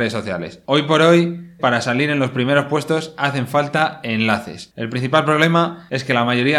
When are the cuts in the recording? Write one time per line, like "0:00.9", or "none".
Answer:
0:01.6